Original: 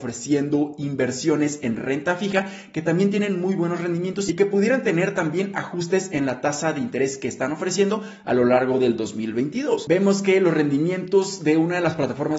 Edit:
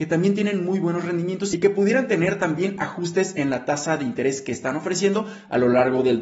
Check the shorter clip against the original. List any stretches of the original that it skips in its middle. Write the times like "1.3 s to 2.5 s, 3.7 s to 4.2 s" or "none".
none

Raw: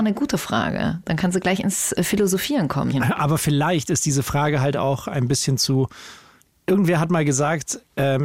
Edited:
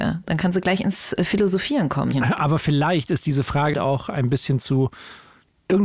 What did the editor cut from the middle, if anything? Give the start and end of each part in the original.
4.5 s to 4.7 s

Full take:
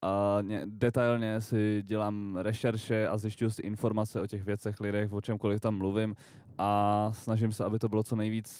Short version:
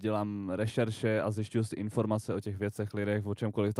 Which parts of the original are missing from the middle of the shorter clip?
none

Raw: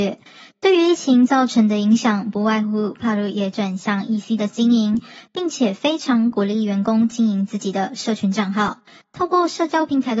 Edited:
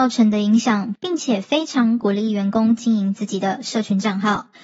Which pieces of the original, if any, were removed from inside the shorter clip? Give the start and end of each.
2.3 s to 5.3 s

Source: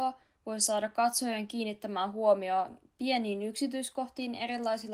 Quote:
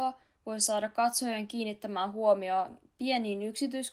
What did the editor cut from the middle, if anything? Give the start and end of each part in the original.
none

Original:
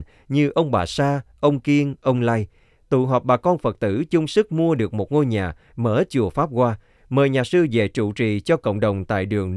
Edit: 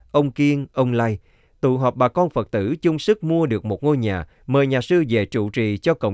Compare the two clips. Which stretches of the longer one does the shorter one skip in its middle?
5.6 s to 6.9 s

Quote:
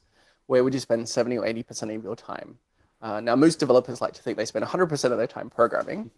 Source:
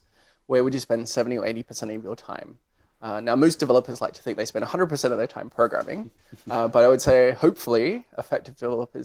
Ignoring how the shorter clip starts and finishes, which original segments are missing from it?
none

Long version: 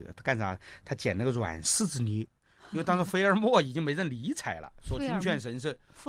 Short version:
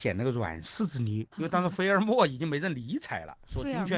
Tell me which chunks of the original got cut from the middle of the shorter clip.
2.3 s to 2.7 s

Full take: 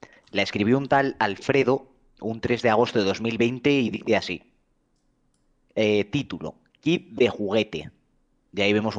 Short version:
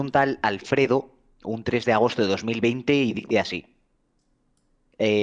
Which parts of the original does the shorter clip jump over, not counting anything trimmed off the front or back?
none

